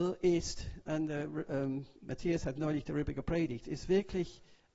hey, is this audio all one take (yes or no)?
no